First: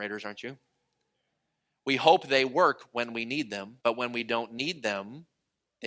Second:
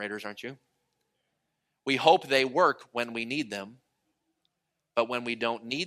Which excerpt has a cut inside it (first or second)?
first